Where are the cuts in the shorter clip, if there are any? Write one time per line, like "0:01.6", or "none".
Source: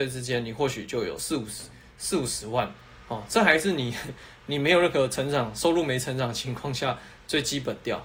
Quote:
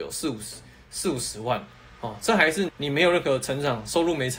0:02.7